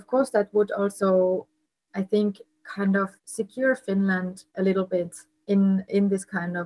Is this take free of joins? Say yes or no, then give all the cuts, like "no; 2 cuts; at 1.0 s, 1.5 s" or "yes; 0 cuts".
no; 2 cuts; at 3.2 s, 4.5 s